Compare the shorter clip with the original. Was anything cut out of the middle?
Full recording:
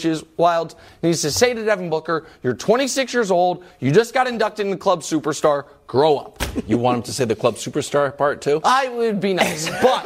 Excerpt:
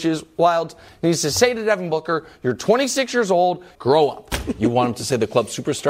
yes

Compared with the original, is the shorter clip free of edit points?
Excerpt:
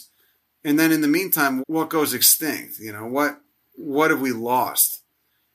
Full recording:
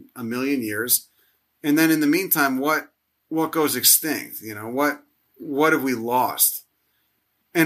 no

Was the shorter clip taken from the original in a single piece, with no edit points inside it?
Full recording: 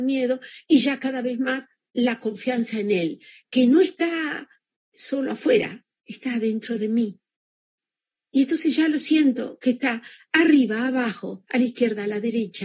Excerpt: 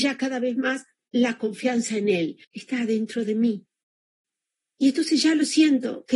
no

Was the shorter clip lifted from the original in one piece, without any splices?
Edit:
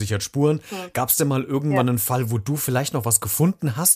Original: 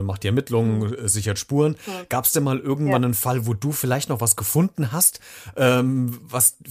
yes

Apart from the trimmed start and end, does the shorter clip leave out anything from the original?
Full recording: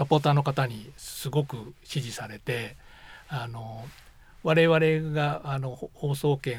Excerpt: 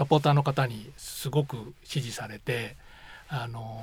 no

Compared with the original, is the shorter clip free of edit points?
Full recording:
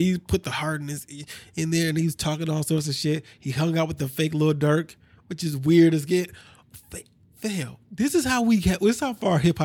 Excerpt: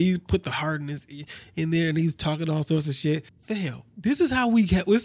no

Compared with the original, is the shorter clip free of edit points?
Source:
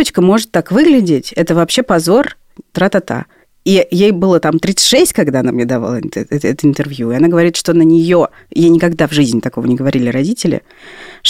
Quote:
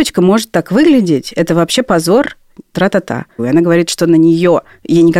no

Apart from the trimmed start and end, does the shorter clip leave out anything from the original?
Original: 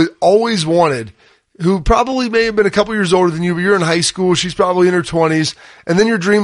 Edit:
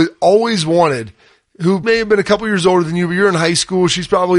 yes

